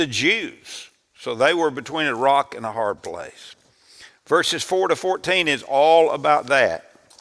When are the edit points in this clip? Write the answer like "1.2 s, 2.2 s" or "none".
4.1 s